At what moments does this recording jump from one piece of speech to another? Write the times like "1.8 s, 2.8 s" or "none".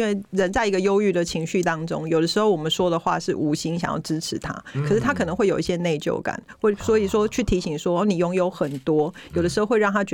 none